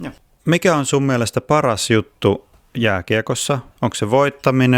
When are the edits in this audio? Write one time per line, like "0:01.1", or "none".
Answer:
0:03.7